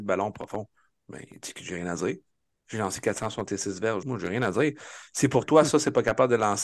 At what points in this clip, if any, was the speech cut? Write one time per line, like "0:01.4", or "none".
0:04.0